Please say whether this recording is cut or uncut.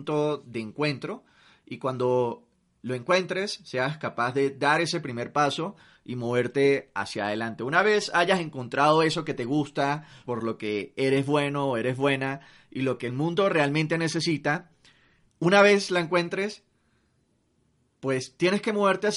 cut